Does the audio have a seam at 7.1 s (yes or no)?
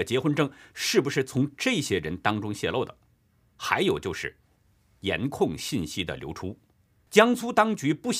yes